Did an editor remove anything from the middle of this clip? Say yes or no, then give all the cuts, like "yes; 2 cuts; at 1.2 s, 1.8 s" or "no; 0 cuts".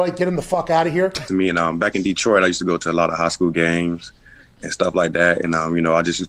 yes; 1 cut; at 1.3 s